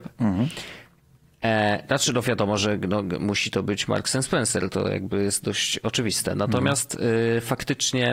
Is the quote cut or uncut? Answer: uncut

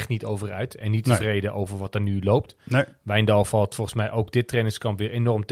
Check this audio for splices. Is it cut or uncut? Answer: uncut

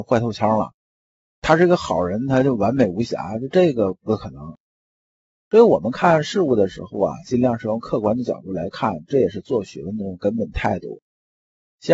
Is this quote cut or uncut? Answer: uncut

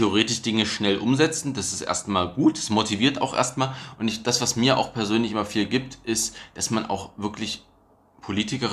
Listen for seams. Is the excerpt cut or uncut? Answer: uncut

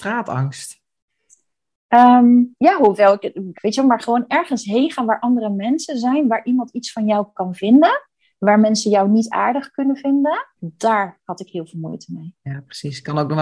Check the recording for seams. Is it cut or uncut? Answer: cut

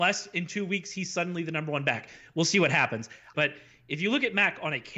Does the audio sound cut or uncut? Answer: cut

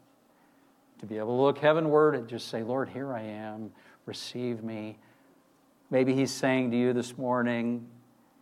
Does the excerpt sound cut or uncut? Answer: cut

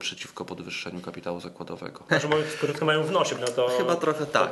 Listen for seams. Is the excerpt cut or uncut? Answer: cut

